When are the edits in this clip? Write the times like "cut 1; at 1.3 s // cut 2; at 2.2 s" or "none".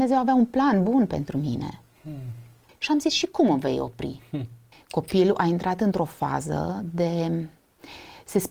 cut 1; at 2.7 s // cut 2; at 4.7 s